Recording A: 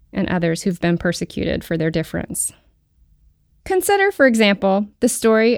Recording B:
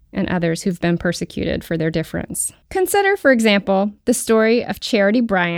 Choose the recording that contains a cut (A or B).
B